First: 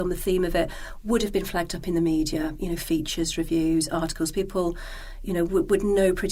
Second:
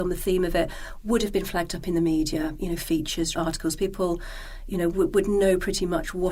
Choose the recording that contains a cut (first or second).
second